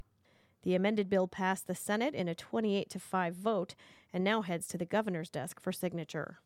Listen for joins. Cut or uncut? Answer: uncut